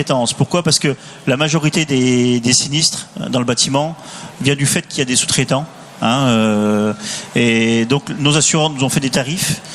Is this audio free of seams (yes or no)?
yes